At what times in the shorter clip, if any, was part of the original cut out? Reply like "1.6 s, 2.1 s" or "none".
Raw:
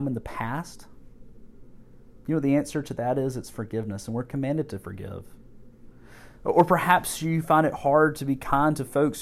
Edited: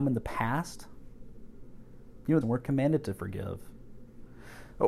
2.4 s